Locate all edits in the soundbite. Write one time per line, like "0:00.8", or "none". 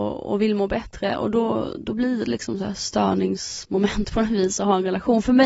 none